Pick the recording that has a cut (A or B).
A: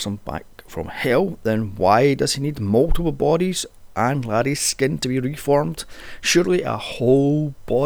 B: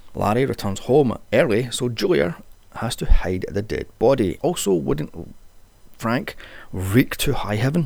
B